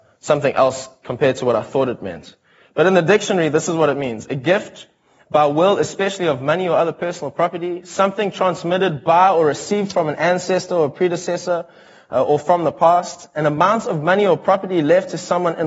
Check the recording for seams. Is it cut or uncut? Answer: uncut